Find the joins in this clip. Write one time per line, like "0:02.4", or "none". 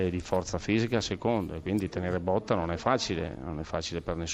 none